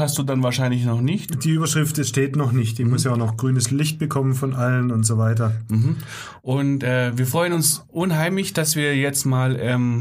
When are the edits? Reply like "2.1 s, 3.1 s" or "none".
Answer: none

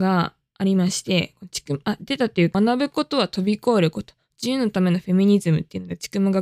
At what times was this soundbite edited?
2.5 s

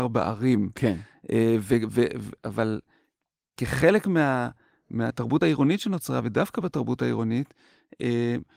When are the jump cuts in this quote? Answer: none

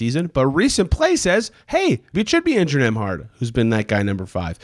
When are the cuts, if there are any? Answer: 2.1 s

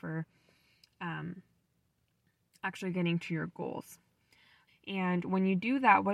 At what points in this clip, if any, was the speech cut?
4.7 s

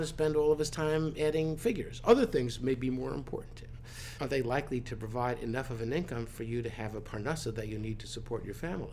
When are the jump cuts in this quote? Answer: 4.2 s

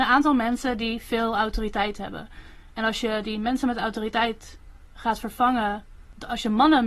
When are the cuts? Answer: none

